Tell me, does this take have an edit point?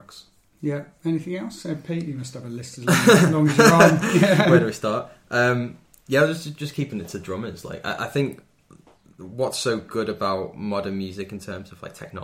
no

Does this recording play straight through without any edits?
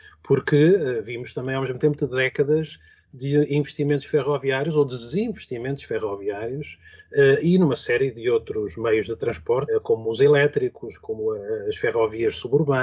no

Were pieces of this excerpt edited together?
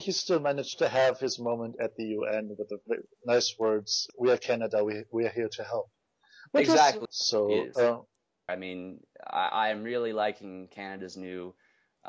yes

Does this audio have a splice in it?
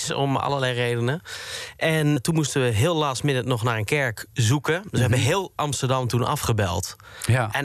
yes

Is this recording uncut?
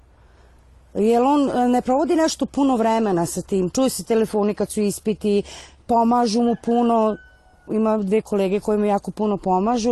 no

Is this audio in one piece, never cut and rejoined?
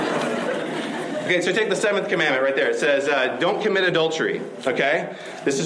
yes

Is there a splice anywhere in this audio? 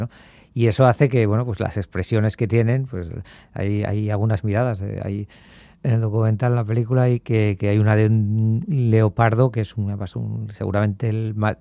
no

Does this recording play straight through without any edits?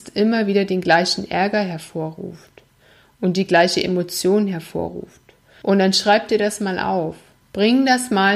yes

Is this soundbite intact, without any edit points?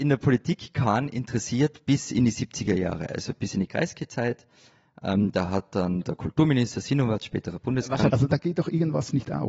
no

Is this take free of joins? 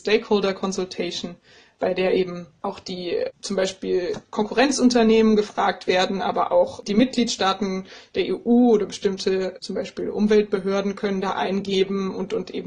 yes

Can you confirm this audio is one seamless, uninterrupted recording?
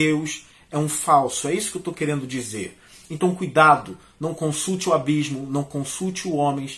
yes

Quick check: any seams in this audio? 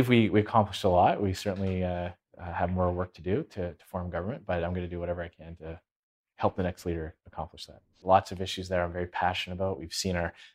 yes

